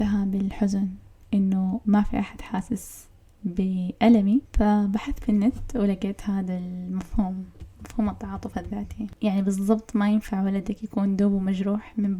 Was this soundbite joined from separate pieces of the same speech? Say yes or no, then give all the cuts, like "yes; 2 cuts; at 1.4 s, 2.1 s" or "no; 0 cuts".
no; 0 cuts